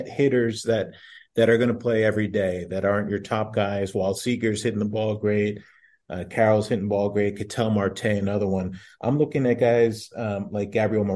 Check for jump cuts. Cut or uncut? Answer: uncut